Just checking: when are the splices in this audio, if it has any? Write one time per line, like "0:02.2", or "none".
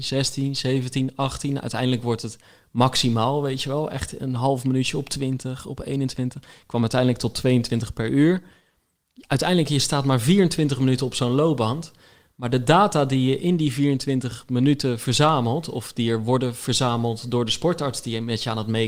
none